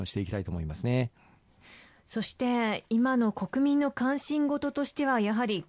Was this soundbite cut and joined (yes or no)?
no